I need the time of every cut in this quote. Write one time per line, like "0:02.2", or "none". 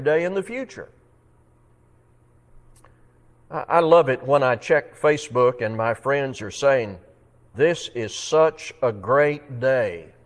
0:07.5